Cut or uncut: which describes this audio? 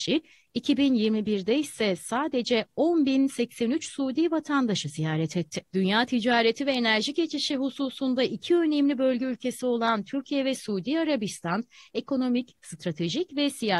cut